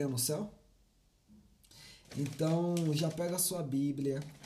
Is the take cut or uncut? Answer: cut